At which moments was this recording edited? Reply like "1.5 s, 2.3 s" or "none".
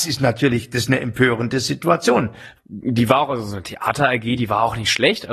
2.6 s